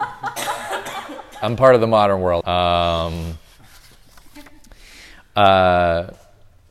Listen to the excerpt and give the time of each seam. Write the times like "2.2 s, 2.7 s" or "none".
2.4 s